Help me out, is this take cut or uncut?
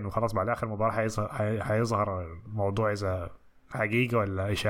uncut